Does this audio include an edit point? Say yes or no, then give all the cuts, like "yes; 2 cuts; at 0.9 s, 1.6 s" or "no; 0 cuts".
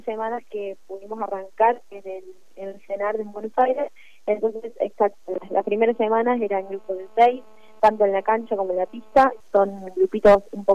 yes; 1 cut; at 9.4 s